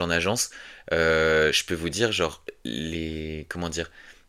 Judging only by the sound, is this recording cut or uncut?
uncut